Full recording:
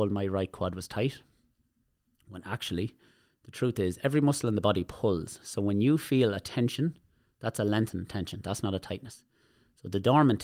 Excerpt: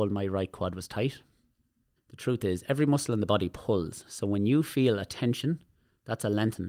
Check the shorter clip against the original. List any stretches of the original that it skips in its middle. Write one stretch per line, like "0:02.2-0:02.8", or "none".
0:02.0-0:03.3

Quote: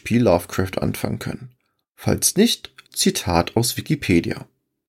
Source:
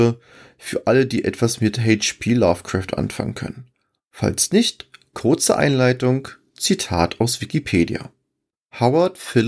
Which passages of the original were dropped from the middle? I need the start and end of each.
0:05.0-0:06.5

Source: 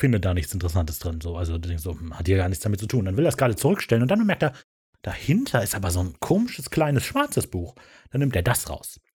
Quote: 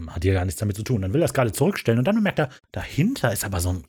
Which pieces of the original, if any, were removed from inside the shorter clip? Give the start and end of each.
0:04.7-0:04.9

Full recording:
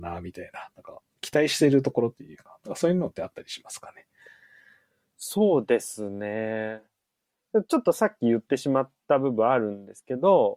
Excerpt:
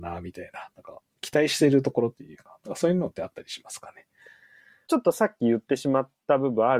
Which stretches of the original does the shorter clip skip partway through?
0:04.9-0:07.7

